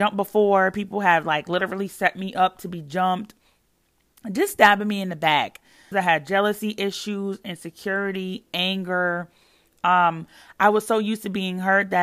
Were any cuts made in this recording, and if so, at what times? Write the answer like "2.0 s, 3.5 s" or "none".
5.9 s

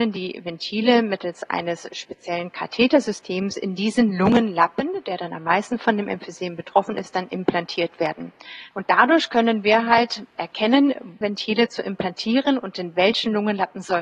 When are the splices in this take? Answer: 8.7 s, 11.2 s

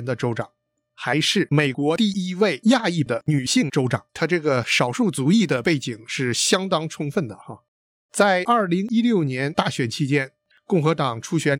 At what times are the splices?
4.1 s

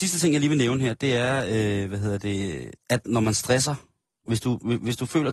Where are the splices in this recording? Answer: none

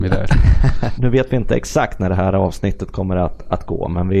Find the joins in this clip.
1.0 s

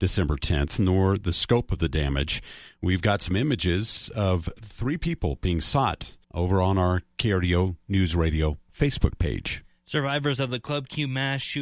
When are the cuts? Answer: 6.2 s

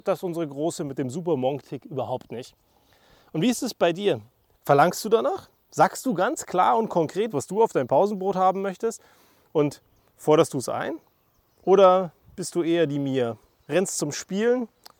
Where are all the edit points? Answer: 4.6 s, 7.3 s

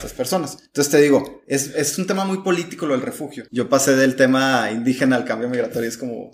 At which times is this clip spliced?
3.5 s

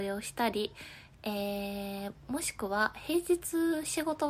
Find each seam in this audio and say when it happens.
1.1 s

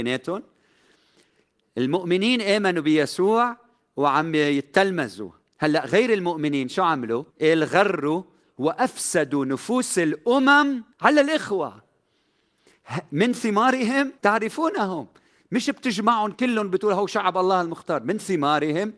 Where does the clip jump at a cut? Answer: 7.3 s, 10.9 s, 14.2 s

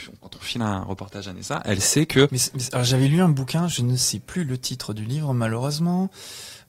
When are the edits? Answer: 2.3 s

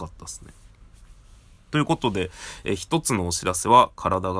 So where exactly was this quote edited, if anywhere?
none

